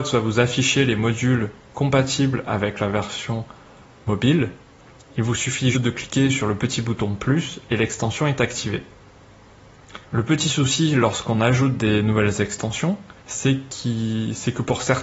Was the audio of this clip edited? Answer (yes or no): yes